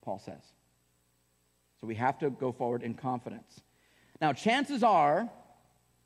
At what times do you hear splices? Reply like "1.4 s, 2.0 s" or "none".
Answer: none